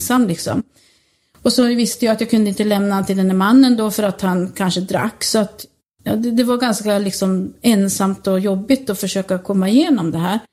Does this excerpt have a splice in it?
no; 0 cuts

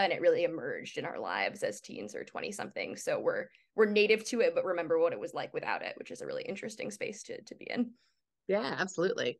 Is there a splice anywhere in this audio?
no; 0 cuts

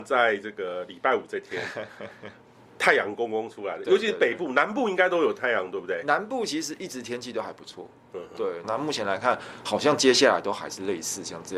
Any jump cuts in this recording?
yes; 1 cut; at 8.6 s

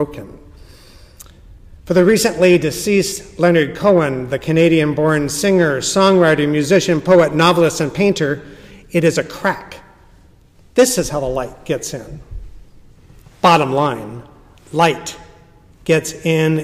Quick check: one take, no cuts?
no; 1 cut; at 15.7 s

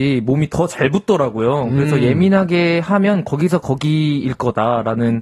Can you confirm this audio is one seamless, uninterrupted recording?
yes; 0 cuts

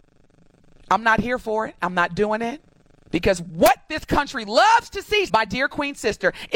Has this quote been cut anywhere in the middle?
yes; 2 cuts; at 3.1 s, 5.3 s

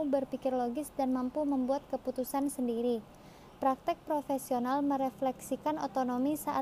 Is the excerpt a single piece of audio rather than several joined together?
yes; 0 cuts

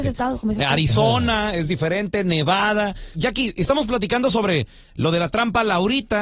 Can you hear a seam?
yes; 1 cut; at 3.1 s

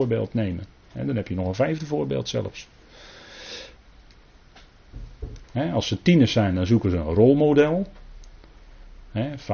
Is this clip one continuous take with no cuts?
no; 1 cut; at 5.4 s

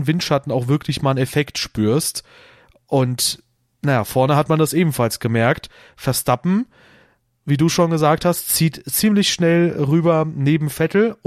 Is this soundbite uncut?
yes; 0 cuts

